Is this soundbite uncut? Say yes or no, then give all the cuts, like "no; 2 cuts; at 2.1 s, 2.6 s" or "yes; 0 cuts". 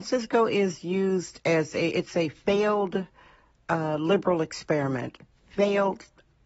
yes; 0 cuts